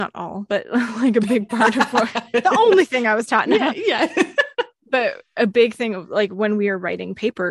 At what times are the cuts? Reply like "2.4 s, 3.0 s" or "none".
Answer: none